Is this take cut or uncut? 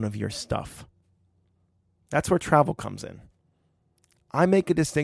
uncut